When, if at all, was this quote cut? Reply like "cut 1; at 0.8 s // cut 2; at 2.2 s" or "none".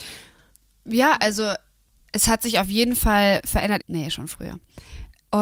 cut 1; at 3.8 s